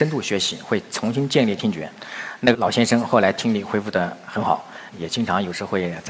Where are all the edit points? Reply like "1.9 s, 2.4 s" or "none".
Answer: 2.5 s, 4.9 s